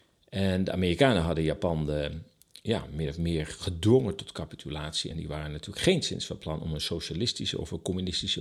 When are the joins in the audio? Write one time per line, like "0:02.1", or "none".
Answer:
none